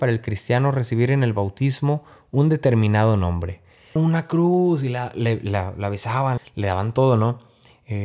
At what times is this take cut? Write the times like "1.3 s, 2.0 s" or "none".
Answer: 4.0 s, 6.4 s